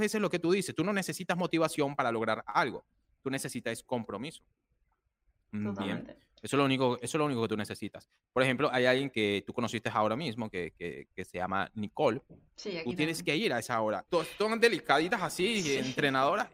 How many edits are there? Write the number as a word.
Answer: three